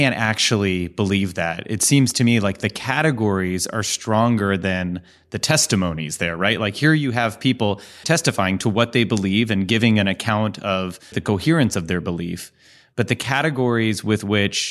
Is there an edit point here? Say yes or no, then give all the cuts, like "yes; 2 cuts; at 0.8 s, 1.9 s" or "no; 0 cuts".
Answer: yes; 2 cuts; at 8.0 s, 11.1 s